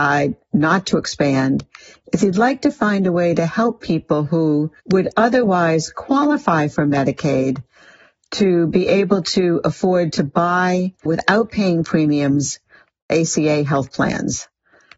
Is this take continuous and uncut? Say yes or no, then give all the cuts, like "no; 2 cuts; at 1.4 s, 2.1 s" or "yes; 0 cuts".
no; 2 cuts; at 4.8 s, 11.1 s